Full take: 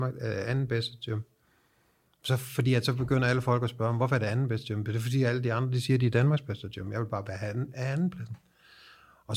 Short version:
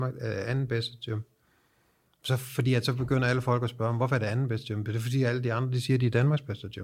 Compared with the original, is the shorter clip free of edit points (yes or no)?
yes